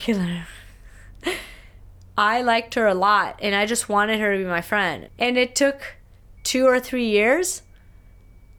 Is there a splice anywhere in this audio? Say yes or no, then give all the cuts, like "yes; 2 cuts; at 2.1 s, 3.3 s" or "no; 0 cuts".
yes; 2 cuts; at 5.1 s, 6.4 s